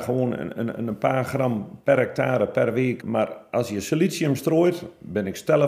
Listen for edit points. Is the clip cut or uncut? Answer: cut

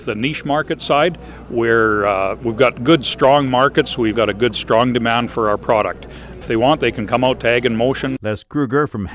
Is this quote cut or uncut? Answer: cut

